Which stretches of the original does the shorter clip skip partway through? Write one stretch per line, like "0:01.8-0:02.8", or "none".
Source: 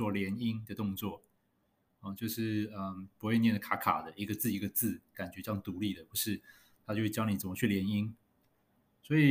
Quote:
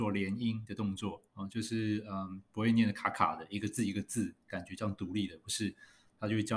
0:01.3-0:01.9